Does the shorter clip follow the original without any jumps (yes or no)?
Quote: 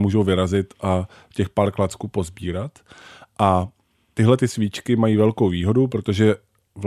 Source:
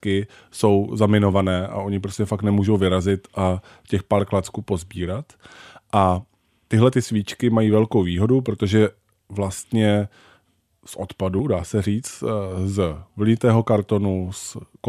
yes